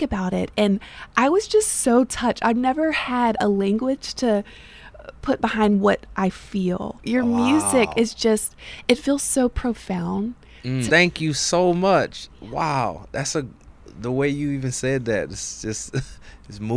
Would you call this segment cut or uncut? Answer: cut